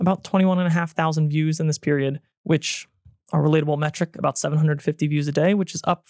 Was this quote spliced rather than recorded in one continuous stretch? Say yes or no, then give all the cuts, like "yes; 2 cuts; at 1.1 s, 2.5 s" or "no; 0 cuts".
no; 0 cuts